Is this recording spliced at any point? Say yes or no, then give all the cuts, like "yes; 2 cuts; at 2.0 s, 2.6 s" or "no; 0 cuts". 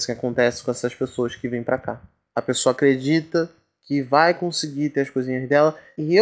no; 0 cuts